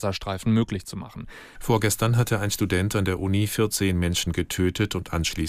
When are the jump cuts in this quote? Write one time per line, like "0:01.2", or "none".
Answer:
0:01.6